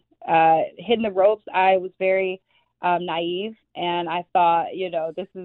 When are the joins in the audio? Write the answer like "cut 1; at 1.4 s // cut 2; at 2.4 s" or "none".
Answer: none